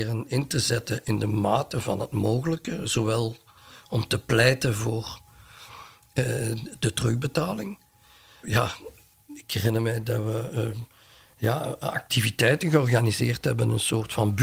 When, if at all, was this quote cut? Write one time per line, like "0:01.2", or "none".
0:08.4